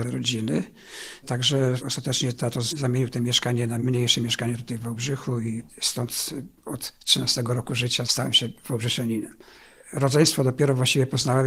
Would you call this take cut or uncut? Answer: uncut